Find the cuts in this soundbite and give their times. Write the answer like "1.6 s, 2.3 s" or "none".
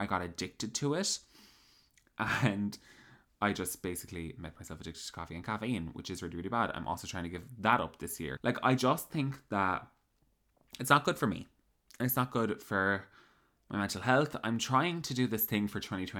8.4 s